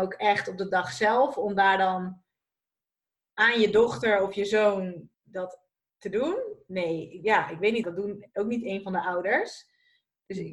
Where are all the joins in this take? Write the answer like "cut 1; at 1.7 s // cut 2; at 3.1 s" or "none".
cut 1; at 5.1 s // cut 2; at 7.8 s